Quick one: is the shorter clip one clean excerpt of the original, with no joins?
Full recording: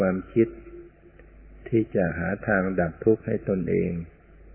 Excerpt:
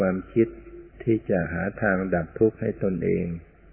no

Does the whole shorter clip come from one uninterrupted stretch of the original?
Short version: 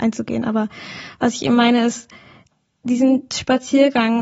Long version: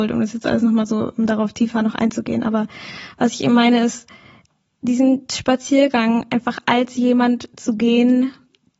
yes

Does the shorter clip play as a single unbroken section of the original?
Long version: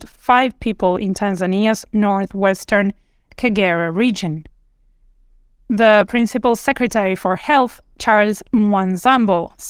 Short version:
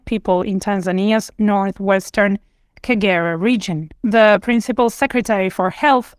no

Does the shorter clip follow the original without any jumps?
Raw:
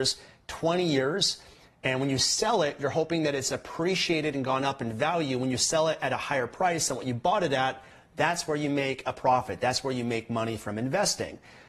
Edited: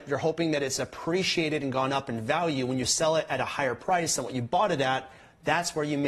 yes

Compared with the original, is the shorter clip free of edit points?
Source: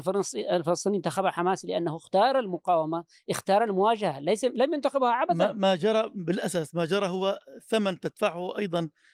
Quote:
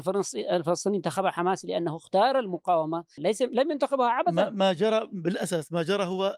no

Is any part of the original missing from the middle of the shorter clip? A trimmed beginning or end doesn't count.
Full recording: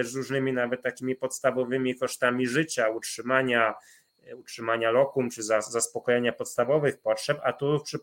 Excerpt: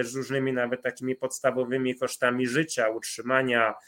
no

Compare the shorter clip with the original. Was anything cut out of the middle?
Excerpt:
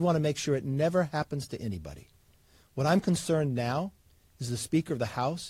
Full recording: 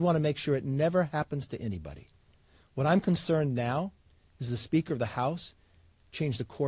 no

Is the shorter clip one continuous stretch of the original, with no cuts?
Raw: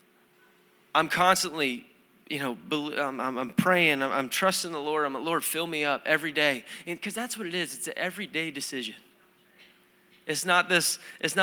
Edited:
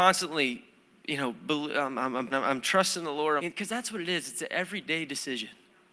no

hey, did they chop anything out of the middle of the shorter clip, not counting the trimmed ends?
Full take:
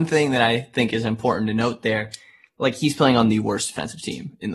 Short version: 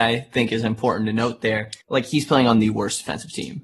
yes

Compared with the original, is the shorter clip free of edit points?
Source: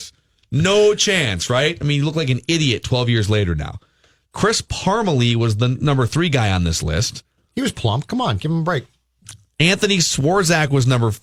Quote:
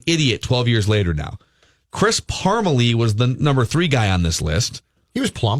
yes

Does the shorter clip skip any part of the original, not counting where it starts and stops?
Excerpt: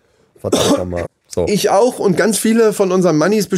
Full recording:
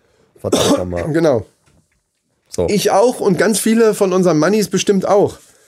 yes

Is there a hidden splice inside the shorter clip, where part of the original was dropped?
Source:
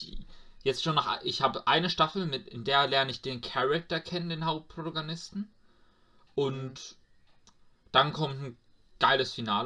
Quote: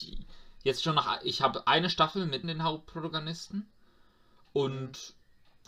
yes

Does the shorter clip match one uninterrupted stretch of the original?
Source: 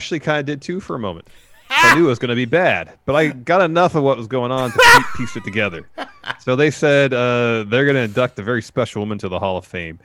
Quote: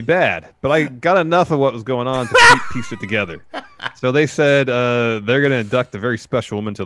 yes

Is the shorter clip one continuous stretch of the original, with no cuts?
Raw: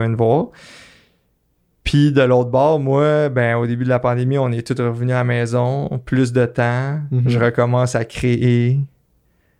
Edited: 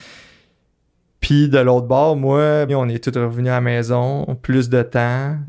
no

